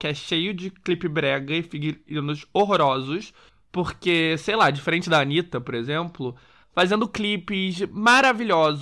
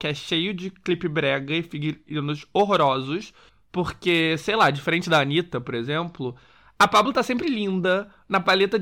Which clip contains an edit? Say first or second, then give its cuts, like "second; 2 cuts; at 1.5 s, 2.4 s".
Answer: first; 1 cut; at 6.6 s